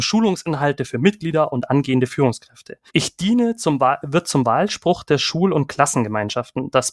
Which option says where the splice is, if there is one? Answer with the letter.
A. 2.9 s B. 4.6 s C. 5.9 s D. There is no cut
A